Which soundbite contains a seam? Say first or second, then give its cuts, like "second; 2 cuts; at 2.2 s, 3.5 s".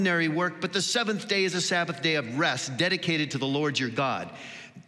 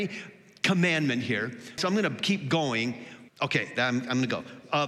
second; 2 cuts; at 1.8 s, 3.3 s